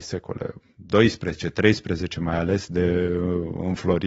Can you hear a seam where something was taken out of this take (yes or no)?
no